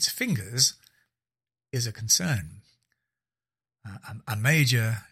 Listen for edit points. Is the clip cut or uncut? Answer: uncut